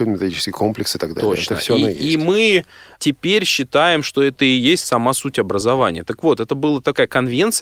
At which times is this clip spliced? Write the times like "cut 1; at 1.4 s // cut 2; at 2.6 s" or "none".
none